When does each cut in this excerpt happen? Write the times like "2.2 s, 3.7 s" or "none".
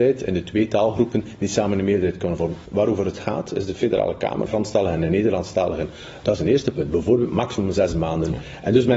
2.7 s, 4.5 s, 6.2 s